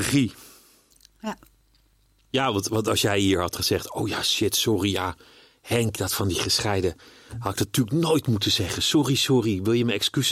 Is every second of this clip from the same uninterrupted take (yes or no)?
yes